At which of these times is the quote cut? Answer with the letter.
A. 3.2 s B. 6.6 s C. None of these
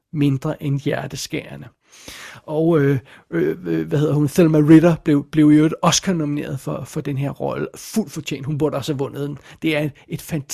C